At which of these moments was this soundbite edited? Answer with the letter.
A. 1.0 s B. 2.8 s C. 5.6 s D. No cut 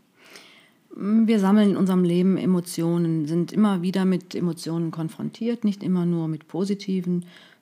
D